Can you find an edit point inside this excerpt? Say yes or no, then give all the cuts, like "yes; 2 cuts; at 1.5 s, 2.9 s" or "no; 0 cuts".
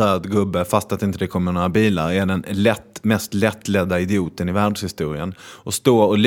no; 0 cuts